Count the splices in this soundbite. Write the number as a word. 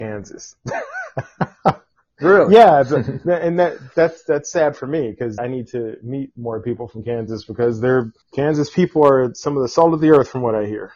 two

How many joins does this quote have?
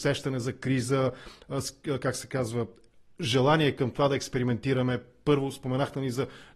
zero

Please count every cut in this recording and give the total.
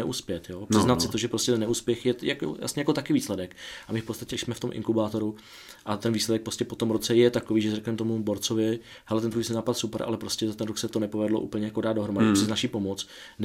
one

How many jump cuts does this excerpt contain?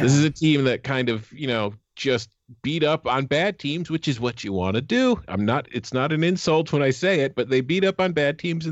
zero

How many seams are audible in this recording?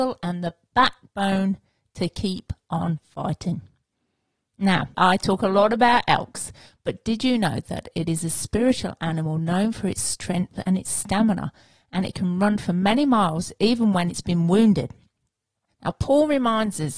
two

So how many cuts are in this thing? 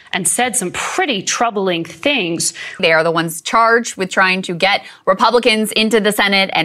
one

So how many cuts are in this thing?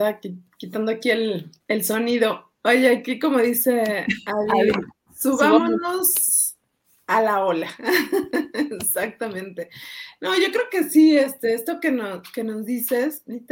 one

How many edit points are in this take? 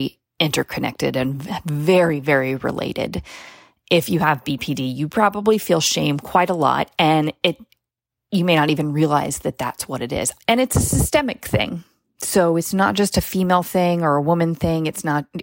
one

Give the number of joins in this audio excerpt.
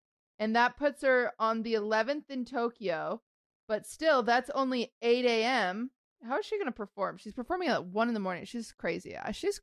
zero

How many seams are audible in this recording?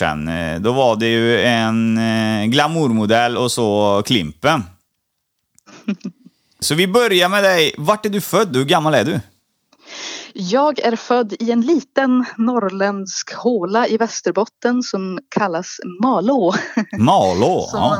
one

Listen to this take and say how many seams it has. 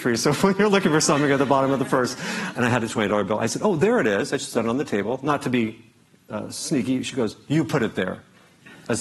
one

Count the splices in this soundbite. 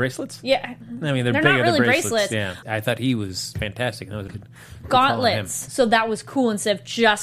three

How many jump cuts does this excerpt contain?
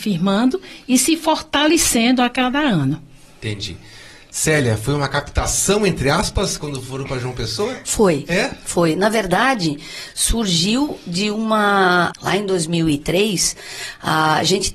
one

